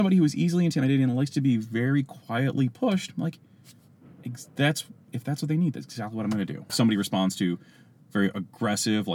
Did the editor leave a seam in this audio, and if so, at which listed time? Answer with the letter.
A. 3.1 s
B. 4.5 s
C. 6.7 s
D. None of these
C